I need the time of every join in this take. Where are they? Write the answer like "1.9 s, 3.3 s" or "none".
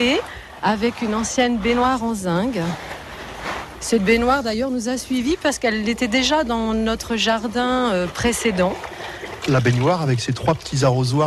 9.4 s